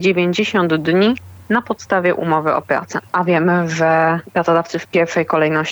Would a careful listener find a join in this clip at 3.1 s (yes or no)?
yes